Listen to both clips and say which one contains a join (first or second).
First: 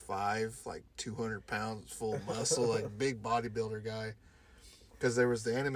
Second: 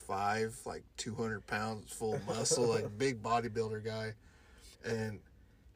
second